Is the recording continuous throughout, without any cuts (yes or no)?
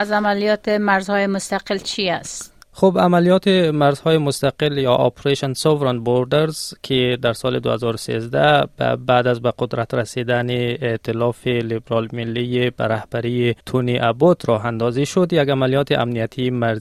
no